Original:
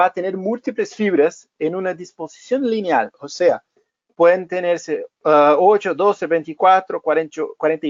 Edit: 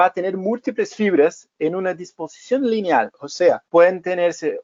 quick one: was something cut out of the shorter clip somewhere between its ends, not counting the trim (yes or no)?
yes